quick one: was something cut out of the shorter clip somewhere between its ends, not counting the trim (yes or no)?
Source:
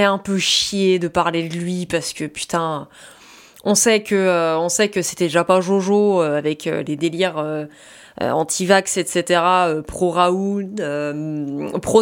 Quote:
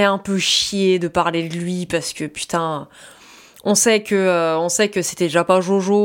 no